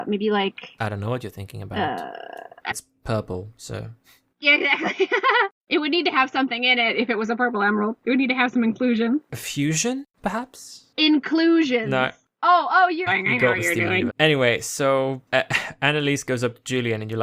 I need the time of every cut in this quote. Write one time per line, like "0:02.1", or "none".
0:02.7
0:13.1
0:14.1